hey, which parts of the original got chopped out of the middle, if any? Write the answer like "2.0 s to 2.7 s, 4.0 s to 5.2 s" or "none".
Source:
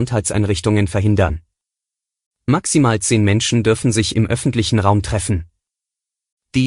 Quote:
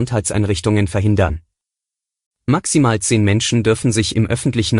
none

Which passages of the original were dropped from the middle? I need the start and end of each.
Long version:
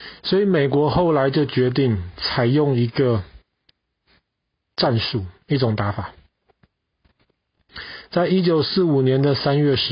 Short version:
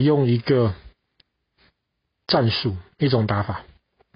none

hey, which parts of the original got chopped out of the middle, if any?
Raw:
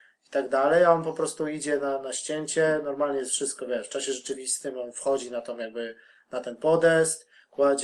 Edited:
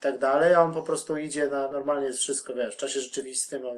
2.0 s to 2.8 s

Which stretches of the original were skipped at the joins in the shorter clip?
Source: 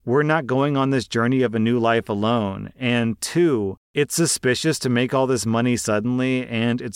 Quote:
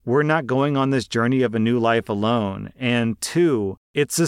none

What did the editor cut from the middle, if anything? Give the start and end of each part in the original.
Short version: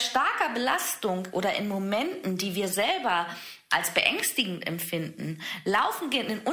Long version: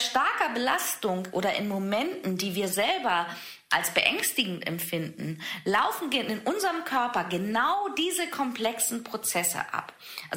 none

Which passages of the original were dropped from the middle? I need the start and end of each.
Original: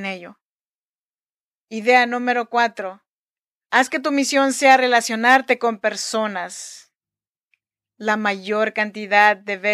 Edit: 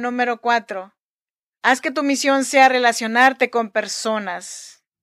none

